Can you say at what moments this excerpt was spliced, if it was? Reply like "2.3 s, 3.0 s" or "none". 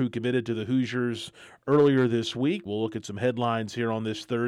2.7 s